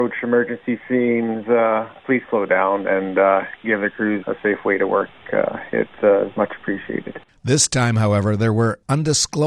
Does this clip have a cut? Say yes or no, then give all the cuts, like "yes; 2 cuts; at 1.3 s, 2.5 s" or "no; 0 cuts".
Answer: yes; 2 cuts; at 4.2 s, 7.4 s